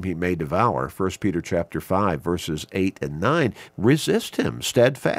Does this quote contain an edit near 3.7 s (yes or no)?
yes